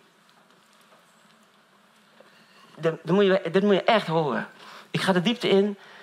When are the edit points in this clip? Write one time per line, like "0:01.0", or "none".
none